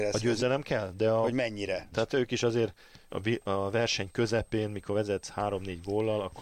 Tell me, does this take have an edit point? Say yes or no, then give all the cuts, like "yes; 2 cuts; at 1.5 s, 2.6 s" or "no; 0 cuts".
yes; 2 cuts; at 1.9 s, 3.1 s